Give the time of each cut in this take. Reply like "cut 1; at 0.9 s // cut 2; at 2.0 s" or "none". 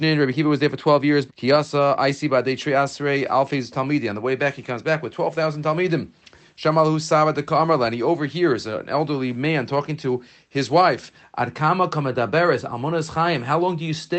cut 1; at 1.3 s